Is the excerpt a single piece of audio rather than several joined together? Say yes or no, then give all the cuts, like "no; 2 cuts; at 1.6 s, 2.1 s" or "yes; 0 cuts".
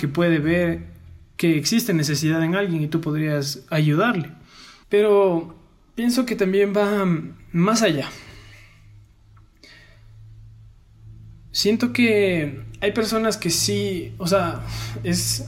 no; 1 cut; at 4.8 s